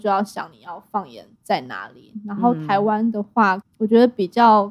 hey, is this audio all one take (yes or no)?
no